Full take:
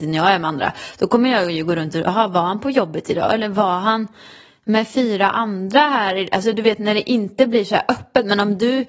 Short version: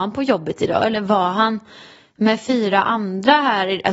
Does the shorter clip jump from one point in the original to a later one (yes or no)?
no